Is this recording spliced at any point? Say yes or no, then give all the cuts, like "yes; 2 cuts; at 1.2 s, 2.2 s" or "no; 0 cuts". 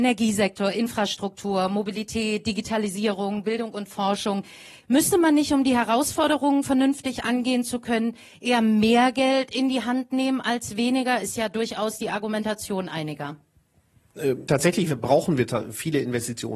no; 0 cuts